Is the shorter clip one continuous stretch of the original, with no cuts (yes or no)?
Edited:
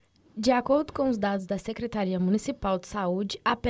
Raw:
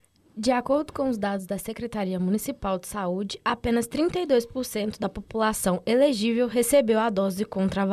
yes